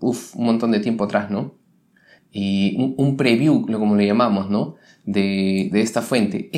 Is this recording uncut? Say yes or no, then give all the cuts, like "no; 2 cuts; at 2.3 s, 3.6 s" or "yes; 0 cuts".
no; 1 cut; at 2.2 s